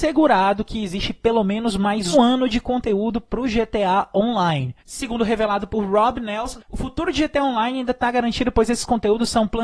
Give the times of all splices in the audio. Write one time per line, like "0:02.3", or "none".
0:02.1
0:04.8
0:06.6